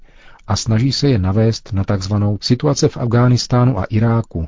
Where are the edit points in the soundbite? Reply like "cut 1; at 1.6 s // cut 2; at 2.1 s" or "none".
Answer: cut 1; at 2.4 s